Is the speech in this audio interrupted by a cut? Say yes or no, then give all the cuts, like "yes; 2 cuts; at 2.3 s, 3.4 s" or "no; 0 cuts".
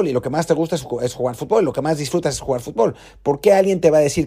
no; 0 cuts